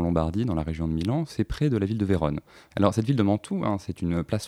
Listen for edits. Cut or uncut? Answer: uncut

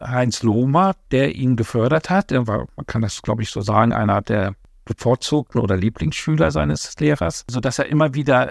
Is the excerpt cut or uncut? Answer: uncut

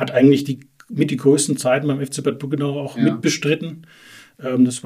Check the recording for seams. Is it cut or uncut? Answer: uncut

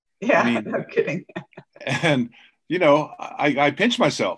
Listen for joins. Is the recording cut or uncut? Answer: cut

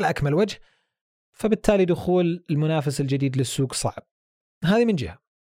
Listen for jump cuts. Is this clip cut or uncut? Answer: uncut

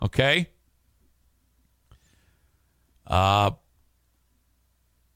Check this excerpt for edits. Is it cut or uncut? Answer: uncut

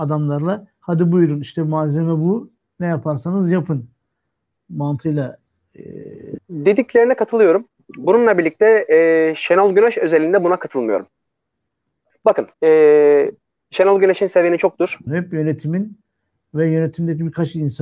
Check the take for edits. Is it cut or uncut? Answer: cut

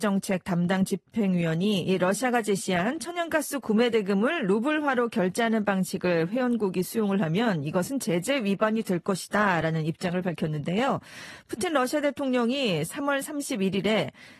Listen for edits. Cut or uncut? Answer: uncut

